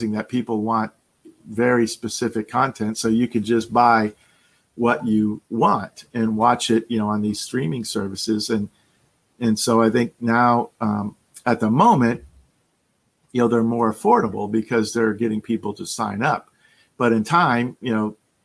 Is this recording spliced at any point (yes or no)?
no